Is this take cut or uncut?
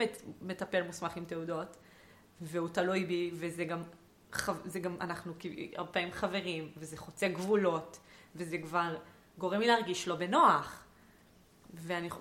uncut